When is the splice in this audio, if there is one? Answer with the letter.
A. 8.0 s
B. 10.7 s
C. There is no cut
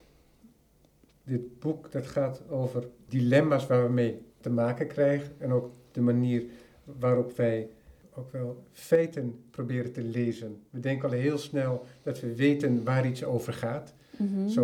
A